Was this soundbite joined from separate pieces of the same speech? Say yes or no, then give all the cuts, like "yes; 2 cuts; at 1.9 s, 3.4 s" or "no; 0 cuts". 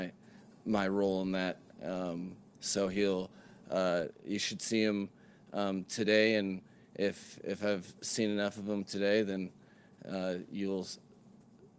no; 0 cuts